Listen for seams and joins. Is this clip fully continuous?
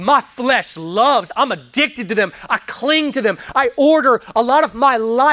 yes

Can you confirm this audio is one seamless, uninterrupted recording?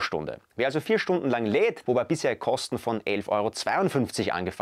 no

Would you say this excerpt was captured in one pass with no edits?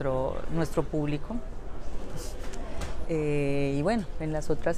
no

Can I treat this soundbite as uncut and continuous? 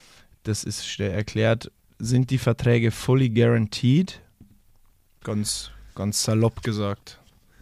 no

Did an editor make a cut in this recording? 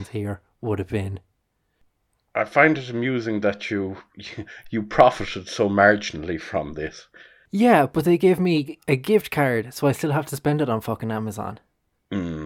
no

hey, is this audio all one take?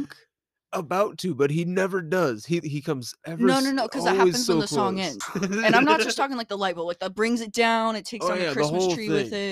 no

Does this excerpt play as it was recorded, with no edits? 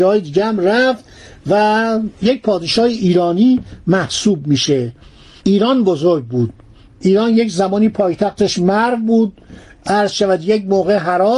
yes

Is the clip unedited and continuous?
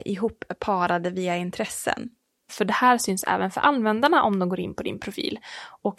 no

